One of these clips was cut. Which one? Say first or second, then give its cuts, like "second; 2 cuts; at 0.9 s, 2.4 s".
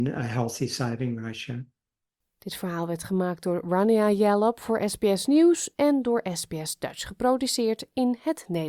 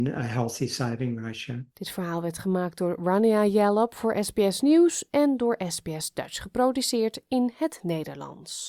second; 1 cut; at 1.7 s